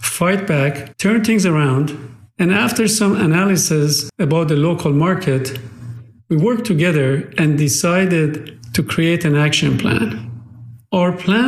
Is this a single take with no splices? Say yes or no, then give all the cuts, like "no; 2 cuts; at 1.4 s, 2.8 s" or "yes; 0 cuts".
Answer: yes; 0 cuts